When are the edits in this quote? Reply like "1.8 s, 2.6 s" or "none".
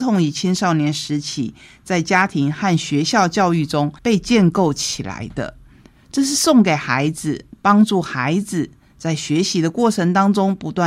4.0 s, 7.5 s